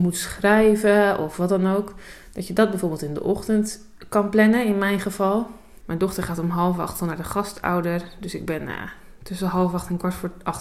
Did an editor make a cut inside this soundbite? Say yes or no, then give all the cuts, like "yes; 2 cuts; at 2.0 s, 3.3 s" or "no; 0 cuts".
yes; 1 cut; at 5.8 s